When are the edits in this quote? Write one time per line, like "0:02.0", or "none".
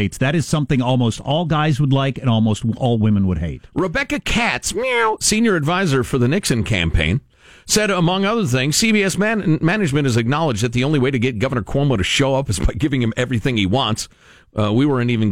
none